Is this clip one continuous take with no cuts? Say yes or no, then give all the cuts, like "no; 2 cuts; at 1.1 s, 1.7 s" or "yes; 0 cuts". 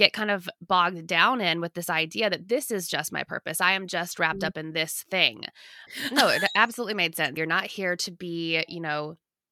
no; 2 cuts; at 5.9 s, 7.4 s